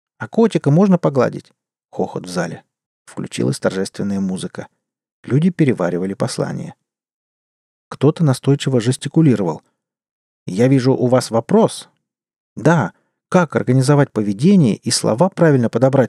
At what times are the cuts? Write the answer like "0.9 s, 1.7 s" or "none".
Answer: 2.9 s